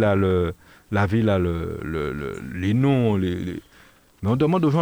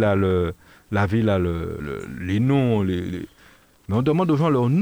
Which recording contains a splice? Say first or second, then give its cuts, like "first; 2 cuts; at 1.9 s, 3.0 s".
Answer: second; 1 cut; at 1.8 s